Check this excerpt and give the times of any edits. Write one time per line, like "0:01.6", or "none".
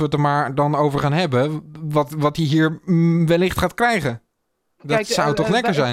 0:04.8